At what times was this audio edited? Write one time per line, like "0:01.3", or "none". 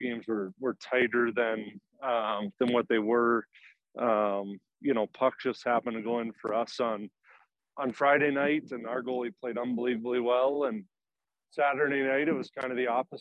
none